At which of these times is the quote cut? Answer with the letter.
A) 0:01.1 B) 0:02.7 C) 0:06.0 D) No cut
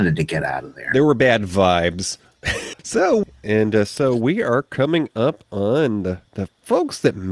B